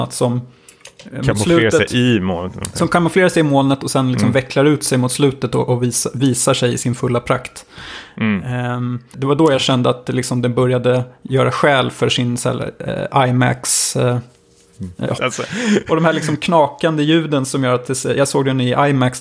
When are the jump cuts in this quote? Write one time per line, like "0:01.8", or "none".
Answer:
0:09.1
0:15.2